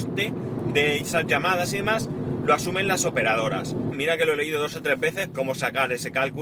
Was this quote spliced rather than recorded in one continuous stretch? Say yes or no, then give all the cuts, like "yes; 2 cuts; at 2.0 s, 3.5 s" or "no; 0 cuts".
yes; 2 cuts; at 3.9 s, 5.3 s